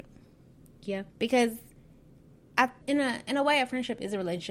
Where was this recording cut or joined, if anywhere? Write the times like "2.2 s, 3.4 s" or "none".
1.1 s, 2.8 s

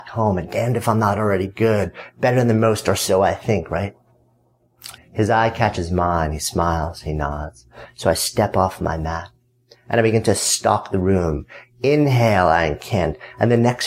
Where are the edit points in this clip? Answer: 4.9 s

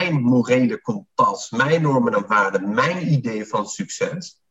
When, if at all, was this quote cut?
none

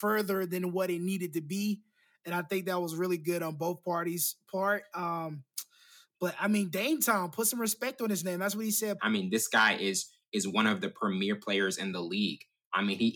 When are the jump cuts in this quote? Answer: 9.0 s

